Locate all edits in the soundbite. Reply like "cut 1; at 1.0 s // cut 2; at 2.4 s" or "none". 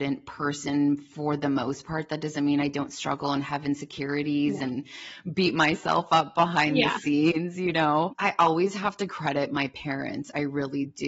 cut 1; at 8.1 s